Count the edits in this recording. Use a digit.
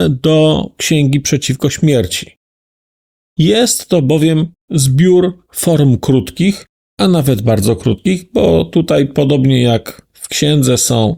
0